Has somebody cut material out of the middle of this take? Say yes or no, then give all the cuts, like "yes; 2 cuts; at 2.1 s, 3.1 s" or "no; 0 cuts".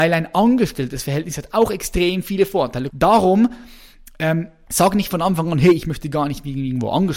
yes; 2 cuts; at 2.9 s, 4.7 s